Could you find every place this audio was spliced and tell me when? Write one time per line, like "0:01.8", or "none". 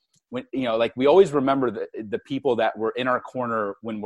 none